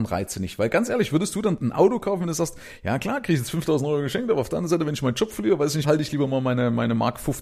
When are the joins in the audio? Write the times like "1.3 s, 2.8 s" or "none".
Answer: 5.8 s